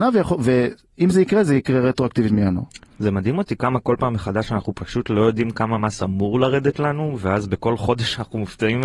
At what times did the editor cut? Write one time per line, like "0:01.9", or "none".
none